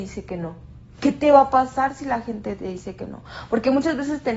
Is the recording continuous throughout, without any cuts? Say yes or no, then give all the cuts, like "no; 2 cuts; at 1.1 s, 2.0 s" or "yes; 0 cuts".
yes; 0 cuts